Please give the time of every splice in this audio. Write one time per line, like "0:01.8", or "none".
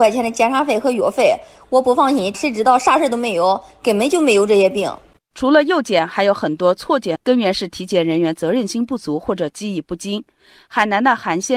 0:02.3
0:07.2